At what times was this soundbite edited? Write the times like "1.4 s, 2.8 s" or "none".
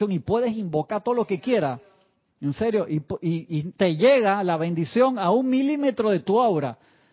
3.7 s